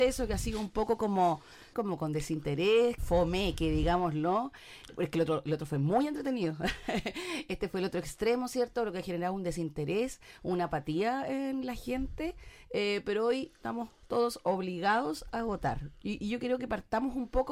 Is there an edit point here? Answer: yes; 2 cuts; at 1.7 s, 3.0 s

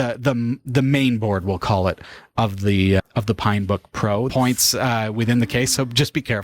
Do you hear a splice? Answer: yes; 2 cuts; at 3.0 s, 4.3 s

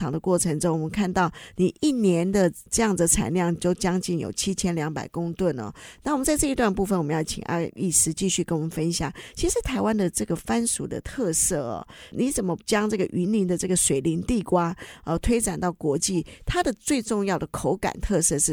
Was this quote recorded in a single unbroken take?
yes; 0 cuts

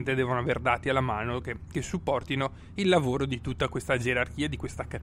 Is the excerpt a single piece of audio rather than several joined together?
yes; 0 cuts

